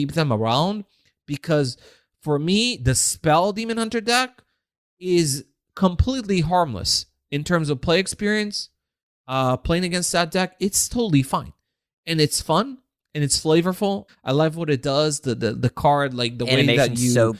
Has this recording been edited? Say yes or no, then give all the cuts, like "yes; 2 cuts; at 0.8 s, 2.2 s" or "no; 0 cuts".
yes; 1 cut; at 14.1 s